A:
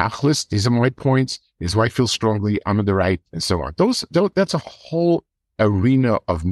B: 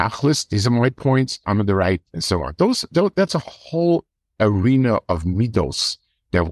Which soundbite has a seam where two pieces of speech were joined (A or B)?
B